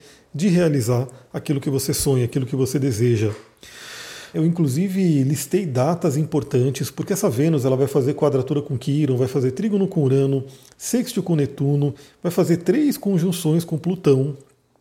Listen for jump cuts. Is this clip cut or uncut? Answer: cut